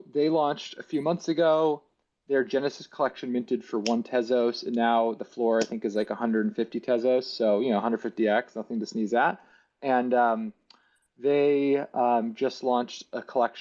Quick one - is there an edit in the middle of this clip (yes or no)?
no